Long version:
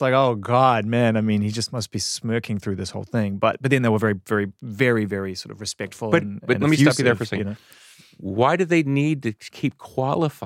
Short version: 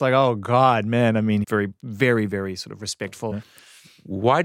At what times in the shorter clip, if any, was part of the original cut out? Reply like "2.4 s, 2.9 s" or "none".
1.4 s, 3.3 s